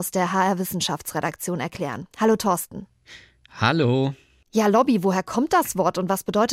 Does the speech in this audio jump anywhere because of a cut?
no; 0 cuts

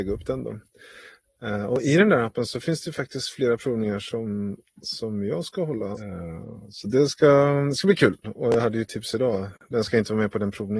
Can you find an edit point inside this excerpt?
yes; 2 cuts; at 6.0 s, 8.2 s

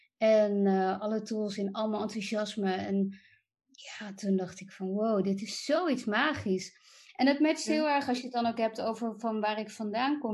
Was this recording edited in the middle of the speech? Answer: no; 0 cuts

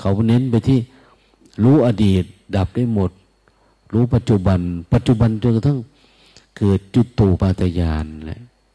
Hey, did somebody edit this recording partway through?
yes; 1 cut; at 7.4 s

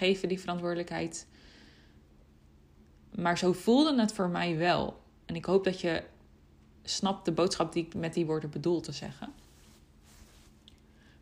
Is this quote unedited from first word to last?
yes; 0 cuts

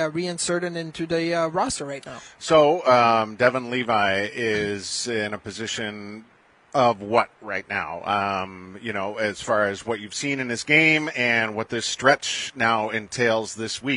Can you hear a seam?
no; 0 cuts

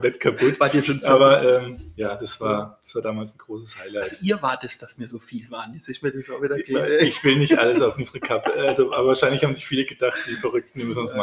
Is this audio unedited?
yes; 0 cuts

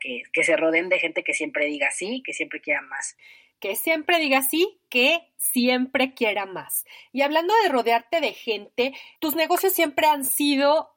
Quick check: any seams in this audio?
no; 0 cuts

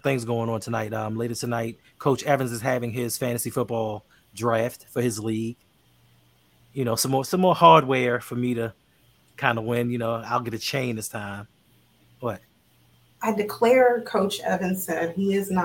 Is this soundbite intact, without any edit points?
yes; 0 cuts

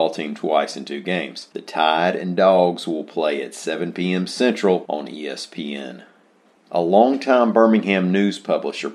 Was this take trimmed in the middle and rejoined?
no; 0 cuts

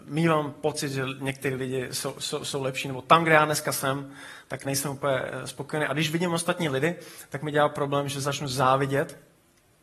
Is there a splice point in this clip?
no; 0 cuts

